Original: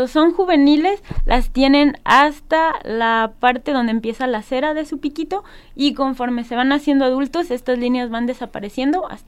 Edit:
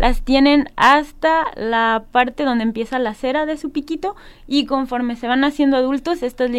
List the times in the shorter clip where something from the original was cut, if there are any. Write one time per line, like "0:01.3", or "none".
none